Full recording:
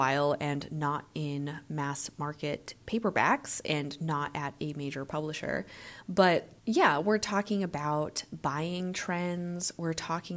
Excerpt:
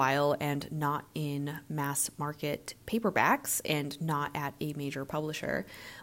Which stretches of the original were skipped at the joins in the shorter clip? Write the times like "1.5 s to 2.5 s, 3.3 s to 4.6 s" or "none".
none